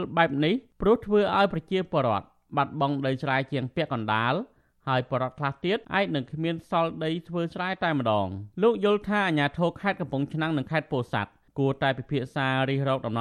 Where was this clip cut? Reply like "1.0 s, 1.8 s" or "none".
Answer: 5.8 s, 8.5 s